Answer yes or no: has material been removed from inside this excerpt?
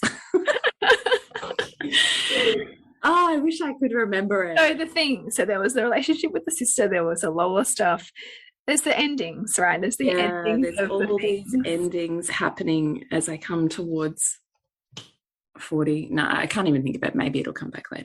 no